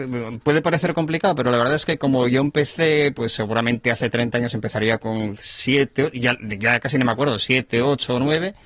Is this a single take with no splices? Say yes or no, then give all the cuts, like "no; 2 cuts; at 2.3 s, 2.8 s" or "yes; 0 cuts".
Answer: yes; 0 cuts